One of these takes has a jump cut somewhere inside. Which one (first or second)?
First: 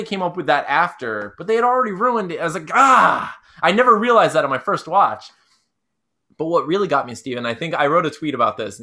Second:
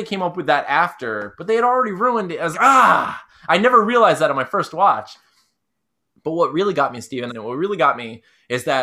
second